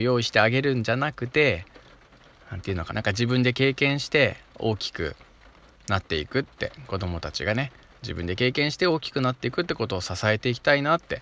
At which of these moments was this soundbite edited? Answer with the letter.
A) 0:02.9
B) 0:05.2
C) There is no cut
A